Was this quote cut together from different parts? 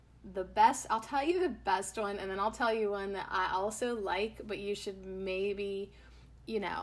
no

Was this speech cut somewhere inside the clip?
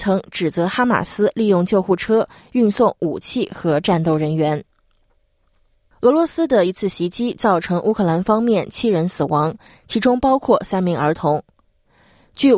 no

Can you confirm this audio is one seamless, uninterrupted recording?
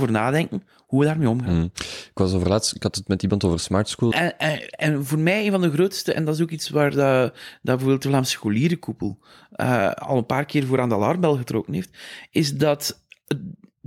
no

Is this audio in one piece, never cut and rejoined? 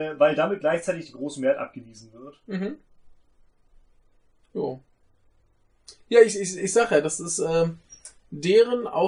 yes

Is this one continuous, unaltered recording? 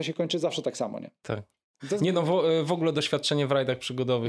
yes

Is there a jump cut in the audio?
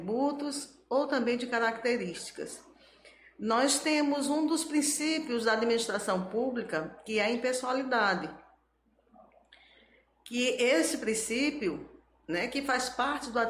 no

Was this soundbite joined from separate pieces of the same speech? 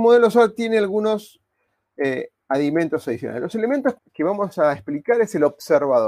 yes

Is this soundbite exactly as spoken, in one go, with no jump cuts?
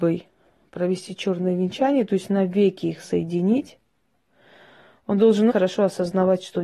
no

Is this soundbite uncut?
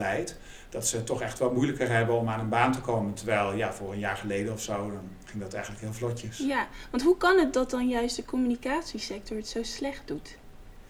yes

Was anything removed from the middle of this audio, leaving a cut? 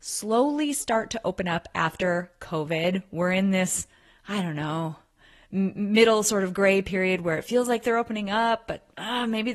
no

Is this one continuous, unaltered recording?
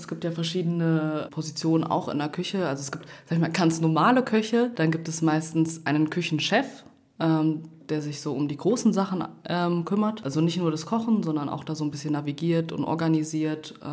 no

